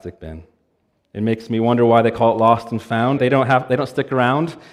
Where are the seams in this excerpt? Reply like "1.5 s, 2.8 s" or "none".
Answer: 3.2 s